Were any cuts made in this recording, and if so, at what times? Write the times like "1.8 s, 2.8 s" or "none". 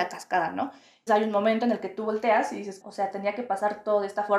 1.1 s, 2.8 s